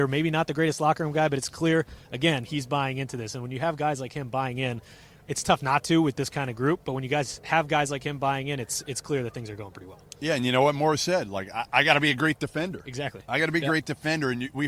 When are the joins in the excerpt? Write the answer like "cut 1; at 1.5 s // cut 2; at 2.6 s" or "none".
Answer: none